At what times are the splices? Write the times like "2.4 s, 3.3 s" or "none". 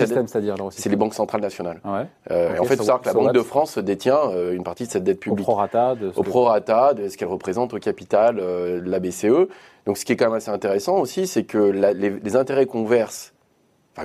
none